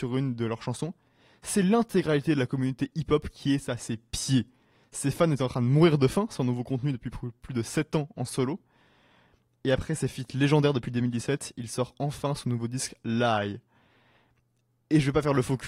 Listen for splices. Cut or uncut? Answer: uncut